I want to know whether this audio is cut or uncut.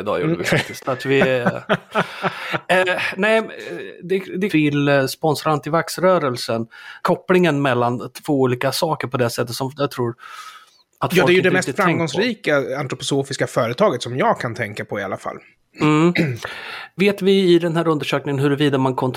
cut